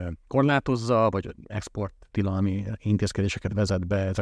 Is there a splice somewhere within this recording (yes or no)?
no